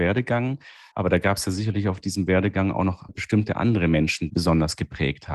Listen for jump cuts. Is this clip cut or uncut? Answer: cut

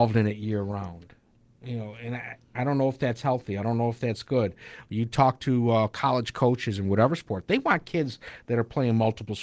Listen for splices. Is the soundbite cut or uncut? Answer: uncut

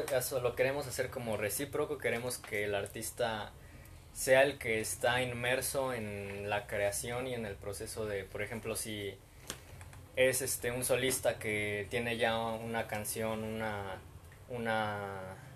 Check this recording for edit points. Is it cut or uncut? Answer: uncut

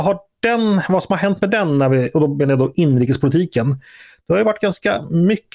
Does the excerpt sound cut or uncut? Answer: uncut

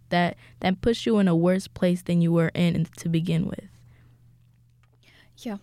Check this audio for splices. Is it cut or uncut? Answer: uncut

